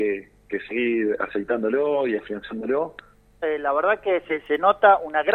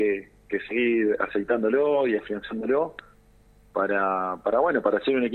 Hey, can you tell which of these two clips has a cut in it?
first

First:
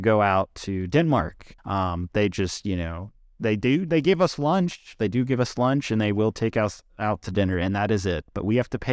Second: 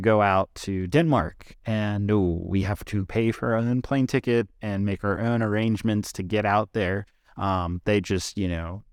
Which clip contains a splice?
first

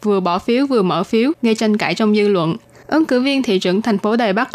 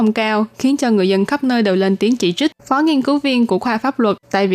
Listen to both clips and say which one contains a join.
second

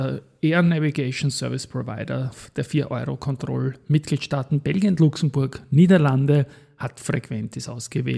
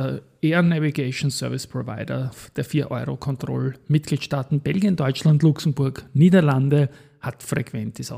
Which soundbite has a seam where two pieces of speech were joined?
first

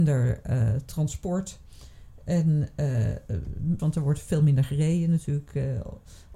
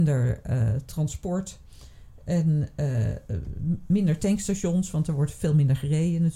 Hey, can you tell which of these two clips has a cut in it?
first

